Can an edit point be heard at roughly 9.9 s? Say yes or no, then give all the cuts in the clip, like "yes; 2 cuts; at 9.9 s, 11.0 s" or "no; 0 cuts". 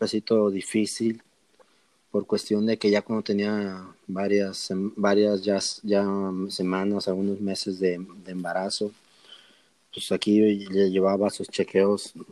no; 0 cuts